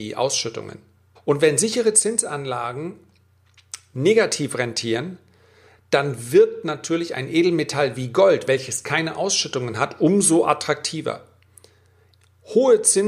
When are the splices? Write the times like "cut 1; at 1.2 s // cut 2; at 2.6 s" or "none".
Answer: cut 1; at 1.2 s